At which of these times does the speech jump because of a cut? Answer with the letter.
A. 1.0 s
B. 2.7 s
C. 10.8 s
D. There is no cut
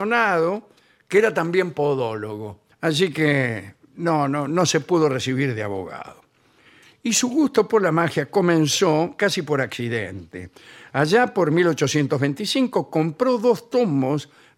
B